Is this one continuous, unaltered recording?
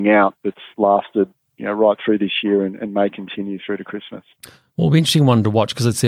yes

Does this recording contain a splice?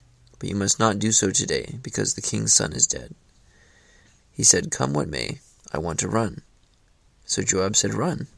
yes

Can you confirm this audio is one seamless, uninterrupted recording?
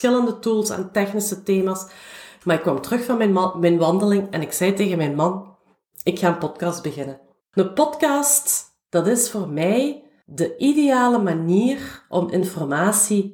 no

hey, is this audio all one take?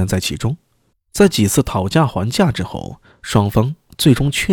no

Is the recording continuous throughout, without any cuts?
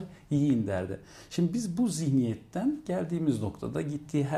yes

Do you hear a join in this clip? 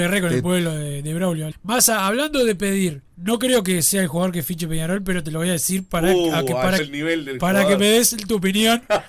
yes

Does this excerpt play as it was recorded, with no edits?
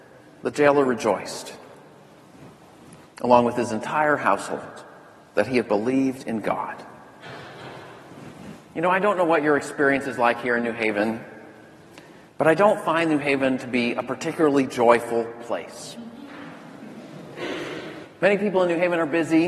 yes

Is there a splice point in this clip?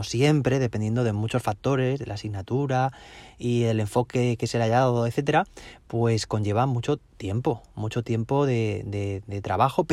no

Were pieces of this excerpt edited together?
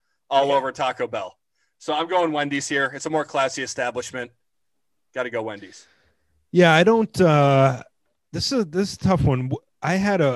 no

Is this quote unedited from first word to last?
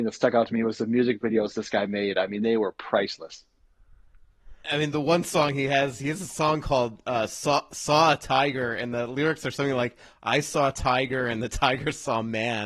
no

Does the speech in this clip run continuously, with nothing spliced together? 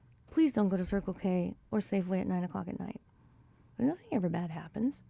no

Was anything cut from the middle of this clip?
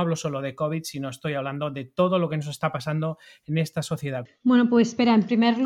yes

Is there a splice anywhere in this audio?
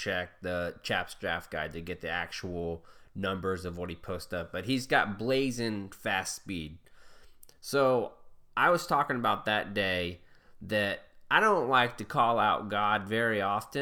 no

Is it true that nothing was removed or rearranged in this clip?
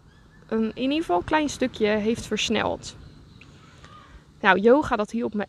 yes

